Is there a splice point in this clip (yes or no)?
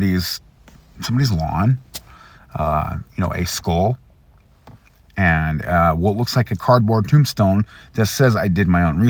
no